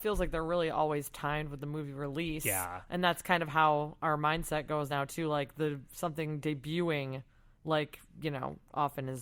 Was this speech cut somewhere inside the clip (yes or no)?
no